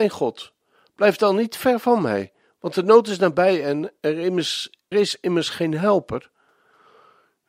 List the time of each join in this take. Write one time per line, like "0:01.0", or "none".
0:04.9